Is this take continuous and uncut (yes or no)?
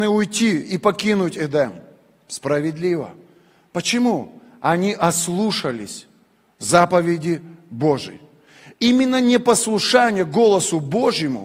yes